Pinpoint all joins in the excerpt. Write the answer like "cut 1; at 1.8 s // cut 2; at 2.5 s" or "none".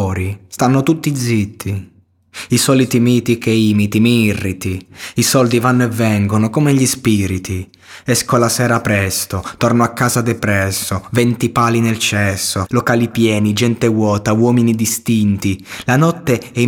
cut 1; at 12.7 s